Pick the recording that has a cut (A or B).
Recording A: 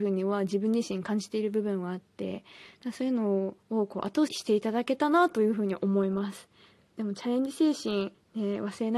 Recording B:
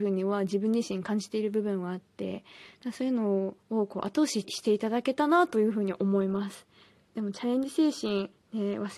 A